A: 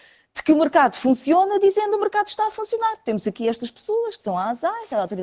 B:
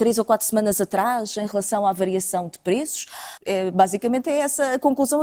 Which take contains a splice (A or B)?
B